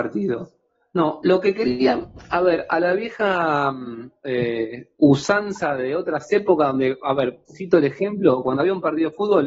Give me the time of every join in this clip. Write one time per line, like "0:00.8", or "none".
none

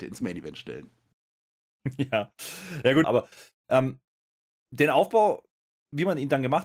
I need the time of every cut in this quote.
0:03.0

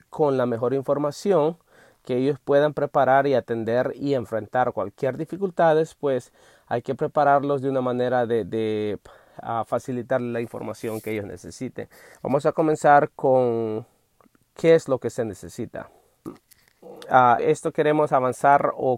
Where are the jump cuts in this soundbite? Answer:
0:12.1
0:16.3
0:17.4

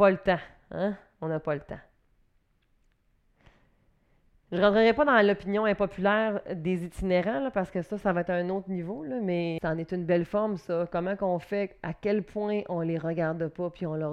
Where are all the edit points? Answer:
0:09.6

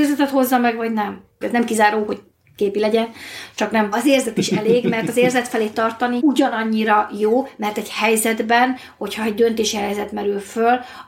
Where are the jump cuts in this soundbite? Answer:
0:01.4
0:03.9
0:06.2

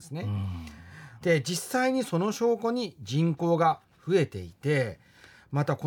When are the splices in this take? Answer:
0:01.2

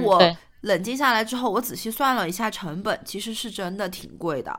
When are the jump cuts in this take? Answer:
none

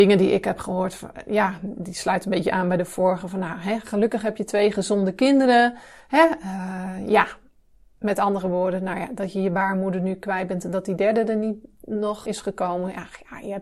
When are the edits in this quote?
0:12.2

